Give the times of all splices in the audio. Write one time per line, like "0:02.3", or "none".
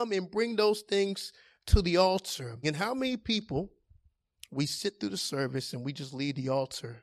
0:02.6